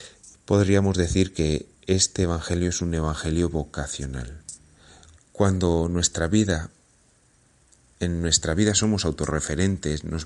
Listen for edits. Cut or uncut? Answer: cut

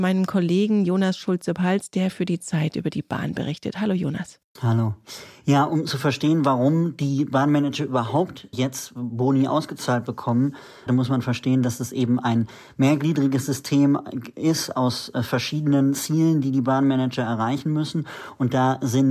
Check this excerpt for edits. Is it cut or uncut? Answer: cut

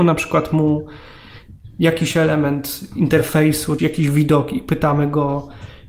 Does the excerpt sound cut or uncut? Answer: cut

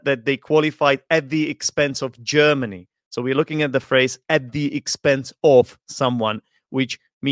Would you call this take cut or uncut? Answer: uncut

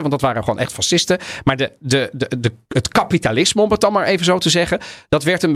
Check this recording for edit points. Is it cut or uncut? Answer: uncut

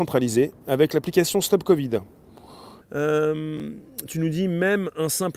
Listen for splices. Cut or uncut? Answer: cut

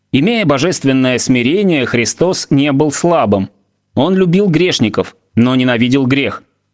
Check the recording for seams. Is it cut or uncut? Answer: uncut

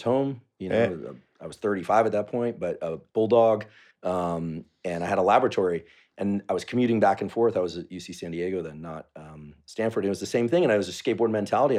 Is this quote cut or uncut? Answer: uncut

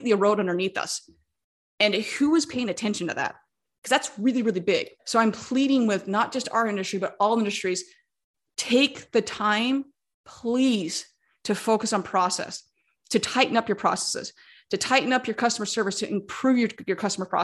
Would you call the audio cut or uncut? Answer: cut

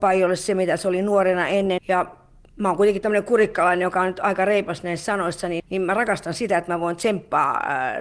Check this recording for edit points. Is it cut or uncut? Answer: cut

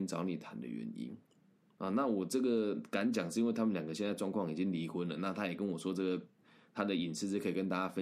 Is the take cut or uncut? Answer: uncut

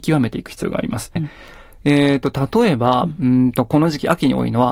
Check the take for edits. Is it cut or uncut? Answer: cut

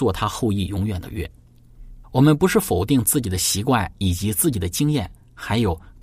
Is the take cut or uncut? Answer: cut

